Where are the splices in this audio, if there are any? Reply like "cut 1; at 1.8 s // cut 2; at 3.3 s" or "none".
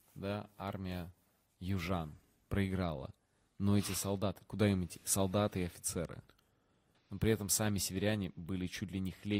cut 1; at 6.9 s